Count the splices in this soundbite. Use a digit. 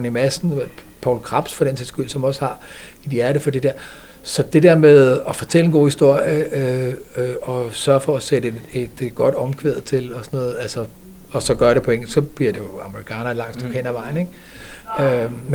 0